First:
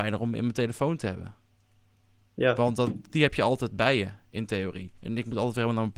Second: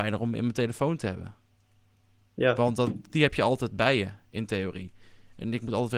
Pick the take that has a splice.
first; 1 cut; at 5.0 s

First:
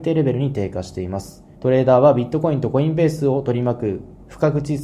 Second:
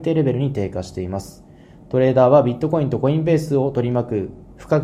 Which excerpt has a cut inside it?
first; 1 cut; at 1.5 s

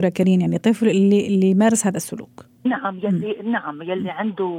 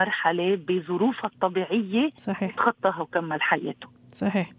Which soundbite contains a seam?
first; 1 cut; at 2.6 s

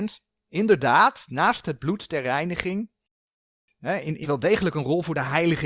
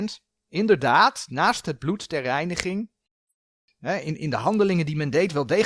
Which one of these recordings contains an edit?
first; 1 cut; at 4.2 s

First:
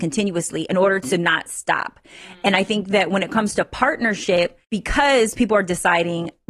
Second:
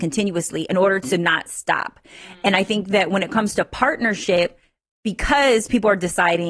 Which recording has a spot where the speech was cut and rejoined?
first; 1 cut; at 4.6 s

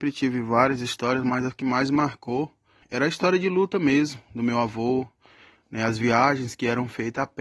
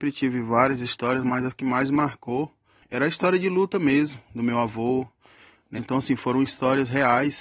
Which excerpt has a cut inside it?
second; 1 cut; at 5.8 s

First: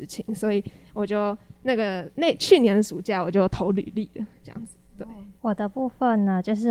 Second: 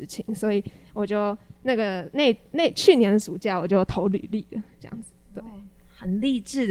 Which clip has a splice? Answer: first; 2 cuts; at 2.1 s, 5.4 s

